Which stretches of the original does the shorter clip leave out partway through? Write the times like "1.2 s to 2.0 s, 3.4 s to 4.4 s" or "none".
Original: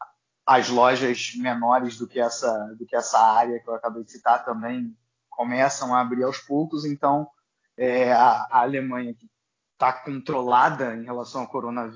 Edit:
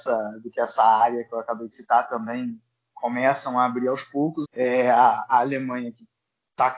6.8 s to 7.7 s